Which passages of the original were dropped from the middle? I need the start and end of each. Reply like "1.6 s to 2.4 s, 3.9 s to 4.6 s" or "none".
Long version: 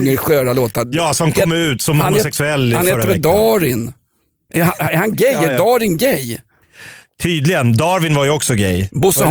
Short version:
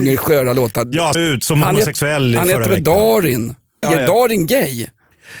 1.1 s to 1.5 s, 4.2 s to 5.3 s